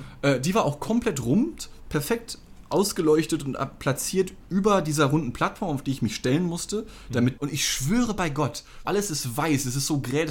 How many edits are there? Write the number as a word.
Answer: two